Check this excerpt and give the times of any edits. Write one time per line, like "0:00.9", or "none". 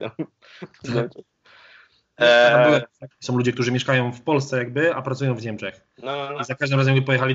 0:03.1